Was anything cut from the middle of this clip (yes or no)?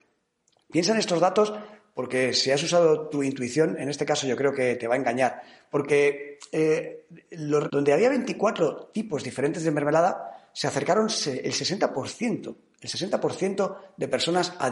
yes